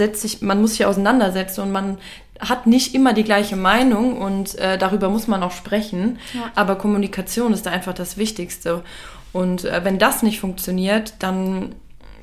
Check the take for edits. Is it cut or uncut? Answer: uncut